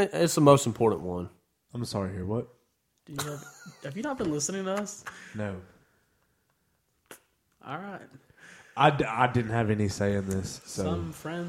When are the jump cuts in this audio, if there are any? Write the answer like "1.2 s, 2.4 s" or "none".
1.6 s